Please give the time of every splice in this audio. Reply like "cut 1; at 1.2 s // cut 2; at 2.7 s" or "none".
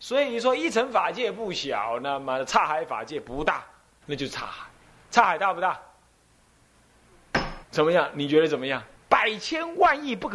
cut 1; at 4.0 s // cut 2; at 7.6 s // cut 3; at 8.9 s